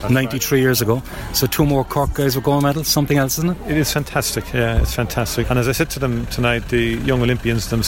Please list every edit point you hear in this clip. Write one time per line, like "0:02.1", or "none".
0:05.4